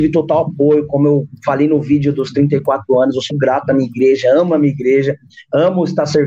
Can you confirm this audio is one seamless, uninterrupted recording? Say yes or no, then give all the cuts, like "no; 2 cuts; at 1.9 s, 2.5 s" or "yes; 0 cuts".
no; 1 cut; at 3.3 s